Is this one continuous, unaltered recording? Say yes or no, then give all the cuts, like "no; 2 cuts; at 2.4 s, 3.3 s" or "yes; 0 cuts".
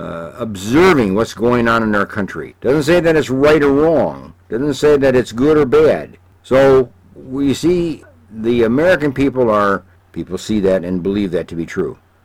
no; 3 cuts; at 2.5 s, 6.4 s, 10.0 s